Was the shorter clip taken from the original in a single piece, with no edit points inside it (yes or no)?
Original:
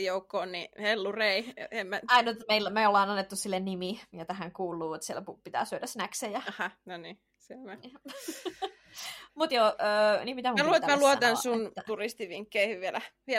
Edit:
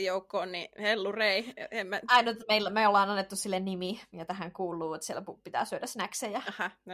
yes